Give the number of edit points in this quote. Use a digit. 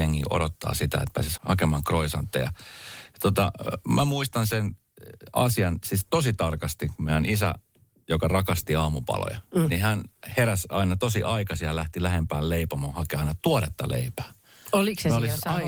1